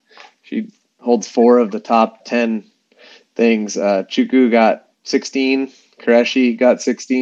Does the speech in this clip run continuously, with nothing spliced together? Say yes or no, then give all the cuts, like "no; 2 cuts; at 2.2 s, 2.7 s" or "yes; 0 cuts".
no; 2 cuts; at 2.2 s, 4.9 s